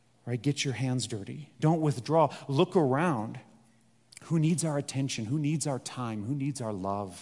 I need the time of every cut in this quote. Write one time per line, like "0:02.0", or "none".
none